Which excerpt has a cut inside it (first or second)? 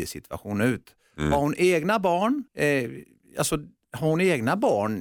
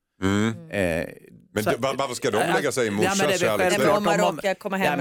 first